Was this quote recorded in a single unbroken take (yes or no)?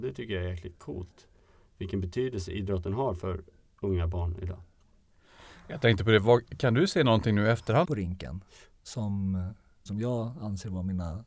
no